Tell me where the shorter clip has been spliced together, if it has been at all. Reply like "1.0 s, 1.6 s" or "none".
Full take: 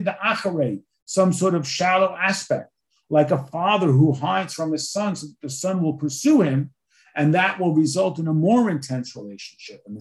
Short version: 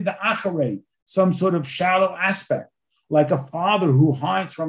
none